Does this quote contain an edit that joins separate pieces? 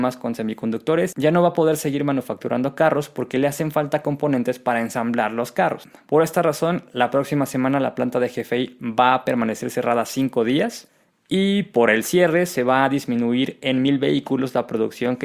no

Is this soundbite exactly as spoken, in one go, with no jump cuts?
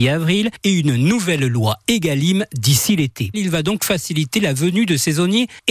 no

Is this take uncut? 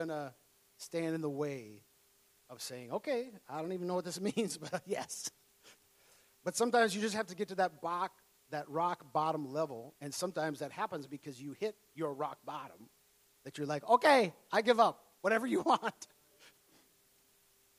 yes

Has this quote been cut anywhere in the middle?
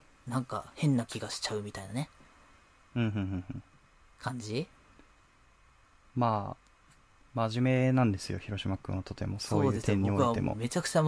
no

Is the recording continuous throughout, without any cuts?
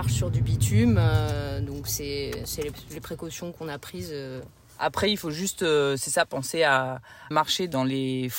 no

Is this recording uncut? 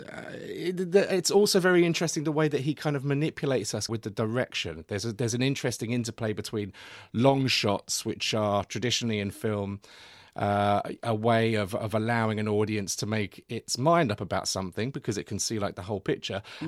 no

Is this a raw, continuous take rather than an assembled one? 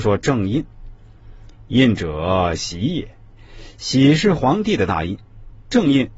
yes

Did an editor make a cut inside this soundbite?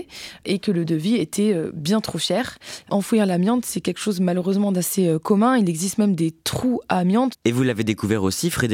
yes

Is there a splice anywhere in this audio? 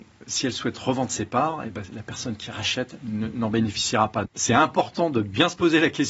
yes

